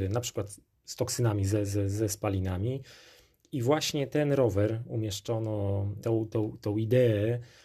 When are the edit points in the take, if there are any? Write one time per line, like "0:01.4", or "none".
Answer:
0:06.0